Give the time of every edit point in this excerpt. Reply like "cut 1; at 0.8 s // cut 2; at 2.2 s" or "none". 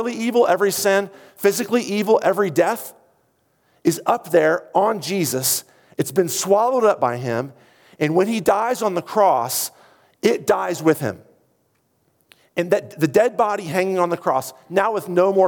none